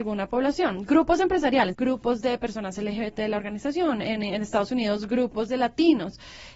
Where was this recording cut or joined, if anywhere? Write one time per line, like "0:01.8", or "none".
0:01.7